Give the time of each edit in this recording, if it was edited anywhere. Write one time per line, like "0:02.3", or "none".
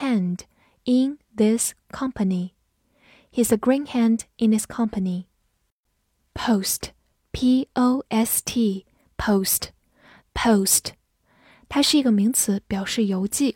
0:10.2